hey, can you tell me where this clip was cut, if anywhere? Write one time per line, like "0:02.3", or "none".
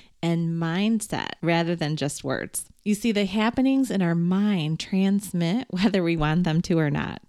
none